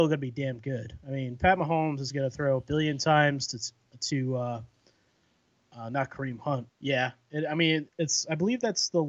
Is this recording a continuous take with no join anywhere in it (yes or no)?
no